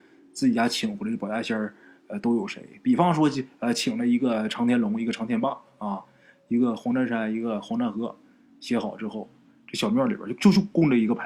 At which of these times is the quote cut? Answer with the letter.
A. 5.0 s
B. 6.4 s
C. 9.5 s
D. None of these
D